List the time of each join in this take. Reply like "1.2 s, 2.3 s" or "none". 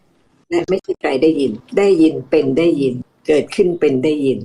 none